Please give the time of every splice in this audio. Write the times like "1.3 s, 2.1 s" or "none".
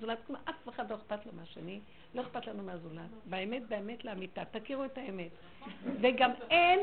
none